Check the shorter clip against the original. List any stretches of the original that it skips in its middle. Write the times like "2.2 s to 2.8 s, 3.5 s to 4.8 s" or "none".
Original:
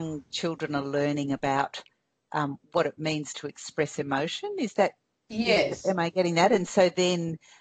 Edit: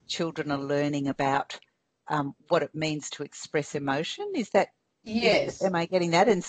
none